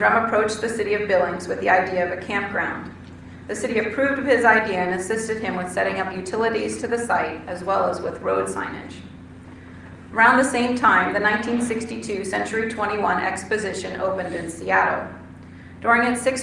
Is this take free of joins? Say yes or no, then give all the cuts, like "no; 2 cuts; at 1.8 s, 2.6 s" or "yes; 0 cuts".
yes; 0 cuts